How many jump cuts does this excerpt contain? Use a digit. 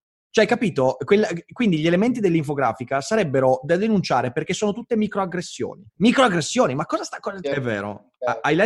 2